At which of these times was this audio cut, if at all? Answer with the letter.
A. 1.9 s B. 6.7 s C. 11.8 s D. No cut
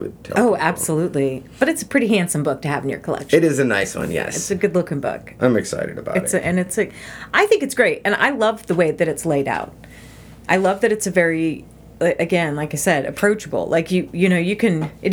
D